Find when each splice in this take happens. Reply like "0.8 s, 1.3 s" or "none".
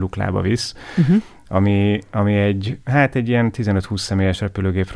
none